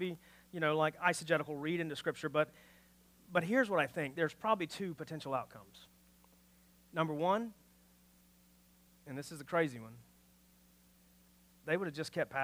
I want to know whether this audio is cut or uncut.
uncut